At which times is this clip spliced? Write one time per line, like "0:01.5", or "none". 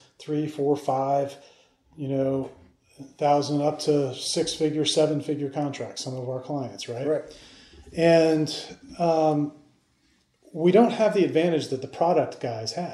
none